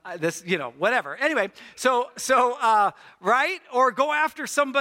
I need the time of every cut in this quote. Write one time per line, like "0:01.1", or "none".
none